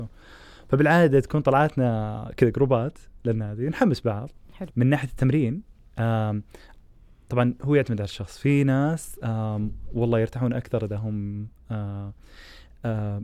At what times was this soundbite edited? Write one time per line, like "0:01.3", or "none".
0:04.7